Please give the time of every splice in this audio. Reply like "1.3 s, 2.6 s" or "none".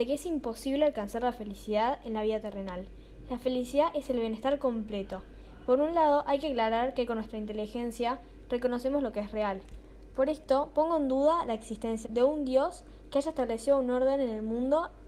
5.7 s, 12.0 s